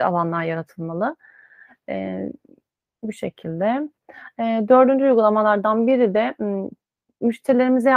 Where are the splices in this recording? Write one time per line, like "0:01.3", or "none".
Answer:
none